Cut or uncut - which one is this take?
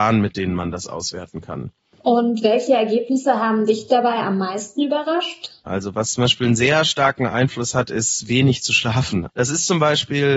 cut